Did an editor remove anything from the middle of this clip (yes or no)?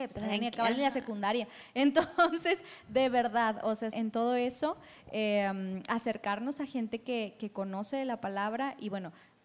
yes